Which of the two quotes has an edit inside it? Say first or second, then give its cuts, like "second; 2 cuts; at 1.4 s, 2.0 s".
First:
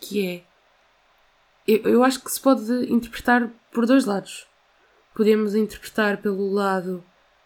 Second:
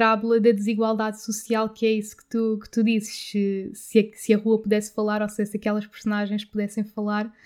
first; 1 cut; at 1.8 s